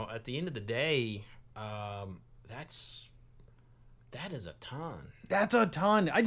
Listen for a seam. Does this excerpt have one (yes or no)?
no